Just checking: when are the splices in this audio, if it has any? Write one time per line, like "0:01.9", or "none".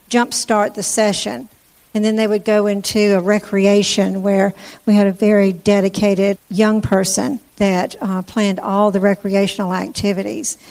0:06.3
0:07.5